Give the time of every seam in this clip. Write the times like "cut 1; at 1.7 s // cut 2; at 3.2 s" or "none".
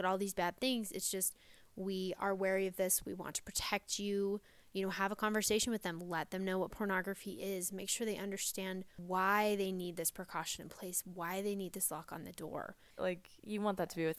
cut 1; at 13.0 s

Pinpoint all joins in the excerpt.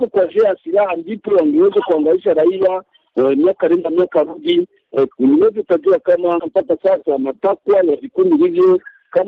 cut 1; at 5.1 s // cut 2; at 6.4 s

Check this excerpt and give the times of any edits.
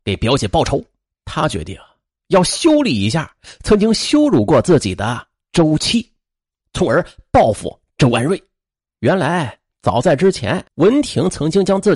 cut 1; at 1.1 s // cut 2; at 8.9 s // cut 3; at 10.7 s

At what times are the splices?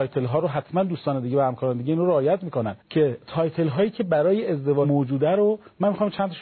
cut 1; at 2.8 s

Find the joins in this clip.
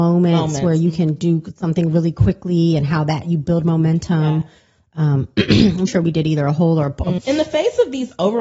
cut 1; at 5.9 s // cut 2; at 7.2 s

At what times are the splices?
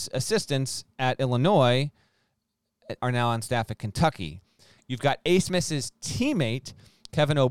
cut 1; at 3.0 s // cut 2; at 4.8 s

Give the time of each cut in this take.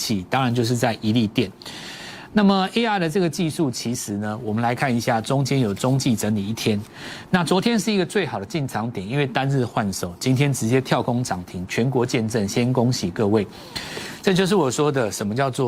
cut 1; at 2.3 s

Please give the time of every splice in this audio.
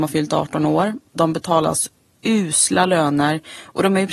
none

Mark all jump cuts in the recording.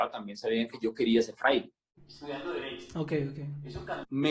cut 1; at 2.0 s

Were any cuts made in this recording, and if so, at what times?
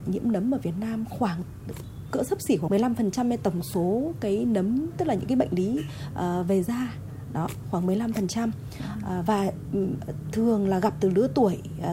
cut 1; at 2.7 s // cut 2; at 9.3 s

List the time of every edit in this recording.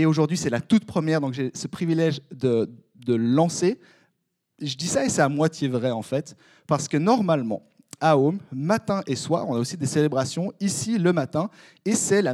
none

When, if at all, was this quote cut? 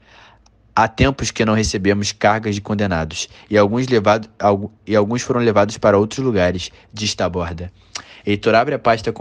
none

